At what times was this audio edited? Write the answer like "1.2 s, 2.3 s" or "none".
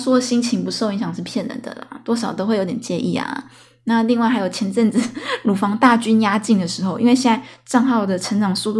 none